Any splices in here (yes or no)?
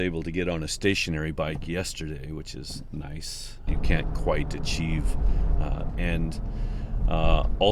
yes